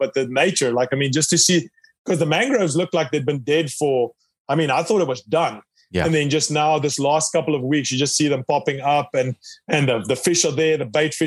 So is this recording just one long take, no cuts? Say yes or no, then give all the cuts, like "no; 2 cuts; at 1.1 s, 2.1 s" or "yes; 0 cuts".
yes; 0 cuts